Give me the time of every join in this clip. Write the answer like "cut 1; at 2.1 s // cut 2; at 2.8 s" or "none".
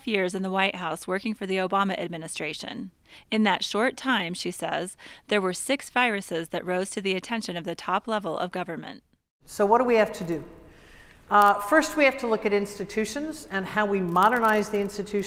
none